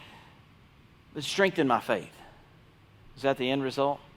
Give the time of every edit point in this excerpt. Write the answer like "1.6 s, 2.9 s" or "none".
3.0 s